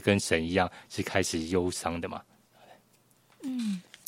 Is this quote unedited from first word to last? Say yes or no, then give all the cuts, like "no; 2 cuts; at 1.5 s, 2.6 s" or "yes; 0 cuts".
yes; 0 cuts